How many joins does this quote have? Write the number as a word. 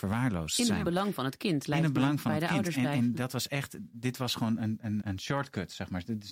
one